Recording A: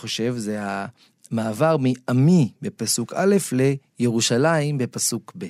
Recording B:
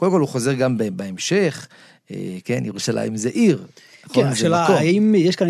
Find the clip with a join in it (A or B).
B